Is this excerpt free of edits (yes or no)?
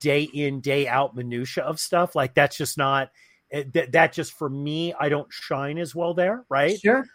yes